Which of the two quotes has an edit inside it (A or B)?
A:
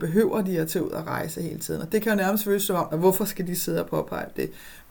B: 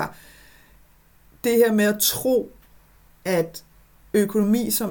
A